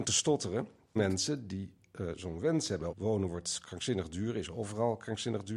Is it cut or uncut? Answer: cut